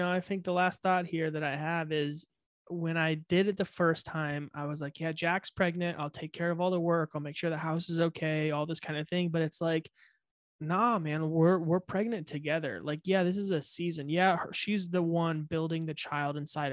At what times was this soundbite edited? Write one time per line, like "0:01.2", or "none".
none